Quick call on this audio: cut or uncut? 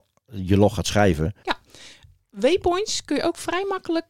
cut